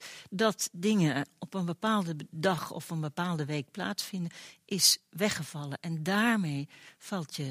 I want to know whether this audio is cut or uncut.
uncut